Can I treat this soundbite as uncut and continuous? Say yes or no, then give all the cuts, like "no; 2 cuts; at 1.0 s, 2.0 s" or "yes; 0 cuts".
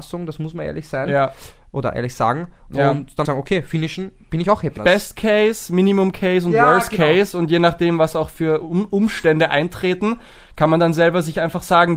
no; 2 cuts; at 3.2 s, 4.8 s